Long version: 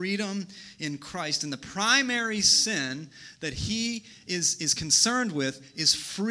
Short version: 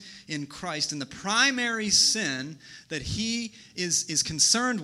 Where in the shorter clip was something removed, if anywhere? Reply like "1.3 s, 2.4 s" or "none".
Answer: none